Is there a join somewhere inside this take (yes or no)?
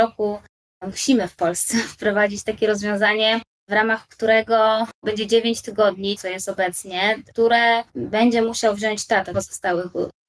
yes